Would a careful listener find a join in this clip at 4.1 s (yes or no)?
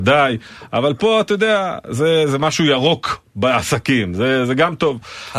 no